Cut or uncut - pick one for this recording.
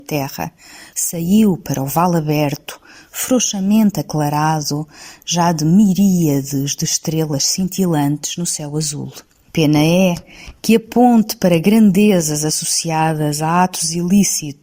cut